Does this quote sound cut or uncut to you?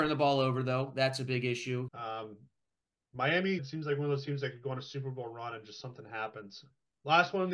cut